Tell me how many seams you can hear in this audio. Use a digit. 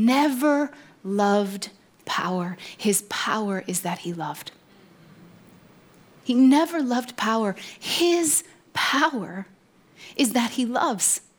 1